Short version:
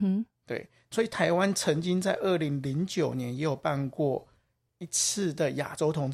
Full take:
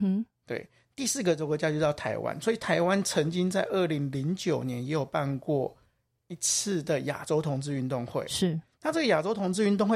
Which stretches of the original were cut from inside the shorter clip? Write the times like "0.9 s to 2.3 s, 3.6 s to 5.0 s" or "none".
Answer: 0.9 s to 2.4 s